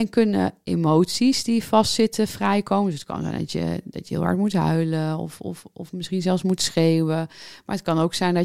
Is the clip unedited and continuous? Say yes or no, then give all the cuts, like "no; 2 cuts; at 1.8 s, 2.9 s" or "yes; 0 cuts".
yes; 0 cuts